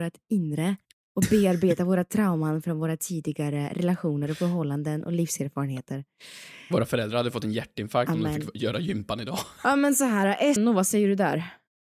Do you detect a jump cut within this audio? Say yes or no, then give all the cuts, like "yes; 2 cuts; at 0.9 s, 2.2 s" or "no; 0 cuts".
yes; 1 cut; at 10.6 s